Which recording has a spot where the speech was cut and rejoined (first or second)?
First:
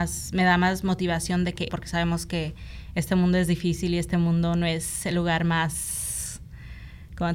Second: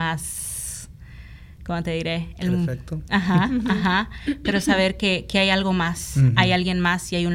first